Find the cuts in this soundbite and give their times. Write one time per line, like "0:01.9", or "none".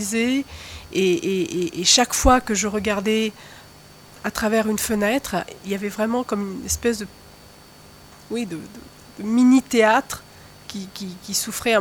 none

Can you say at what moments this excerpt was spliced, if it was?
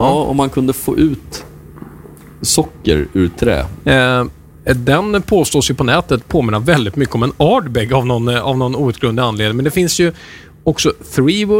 0:03.8

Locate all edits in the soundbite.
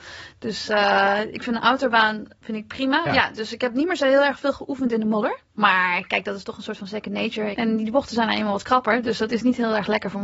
0:03.1
0:05.5
0:07.5

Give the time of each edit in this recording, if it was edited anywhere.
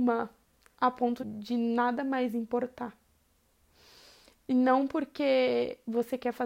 0:01.2

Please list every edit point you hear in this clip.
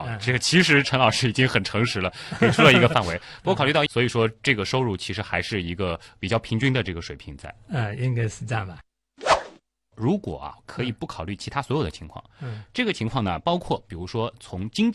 0:03.9

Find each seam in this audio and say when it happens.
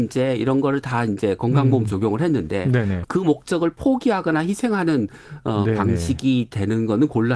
0:03.0

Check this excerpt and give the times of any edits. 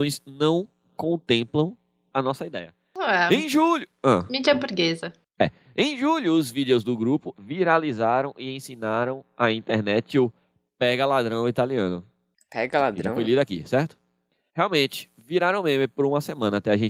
0:07.3
0:14.5

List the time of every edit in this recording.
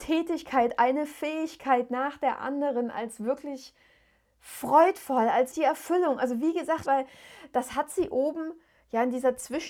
0:05.5
0:06.8

